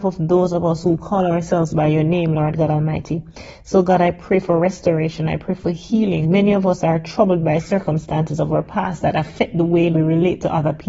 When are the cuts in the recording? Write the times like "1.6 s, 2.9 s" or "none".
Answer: 6.2 s, 9.9 s